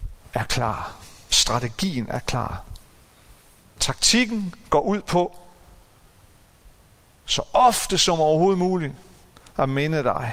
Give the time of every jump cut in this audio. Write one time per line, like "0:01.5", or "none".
none